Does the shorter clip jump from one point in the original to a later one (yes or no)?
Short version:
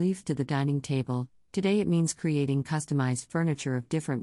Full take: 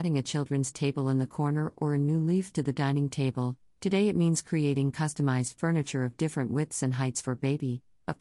no